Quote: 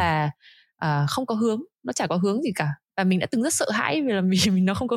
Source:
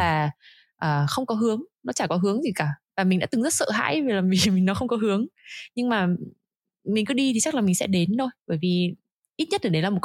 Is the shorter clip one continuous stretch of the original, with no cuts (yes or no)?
yes